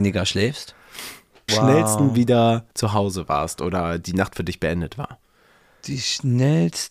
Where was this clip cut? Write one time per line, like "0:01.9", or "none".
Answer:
0:01.5
0:02.7